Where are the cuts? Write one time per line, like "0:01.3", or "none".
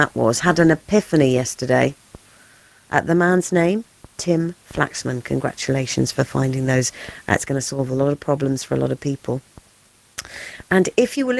0:02.9